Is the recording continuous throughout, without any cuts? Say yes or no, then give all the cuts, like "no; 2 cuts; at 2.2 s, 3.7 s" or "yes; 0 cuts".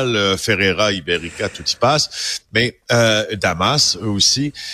yes; 0 cuts